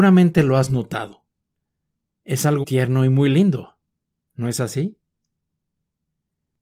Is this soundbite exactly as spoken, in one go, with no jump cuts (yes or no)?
no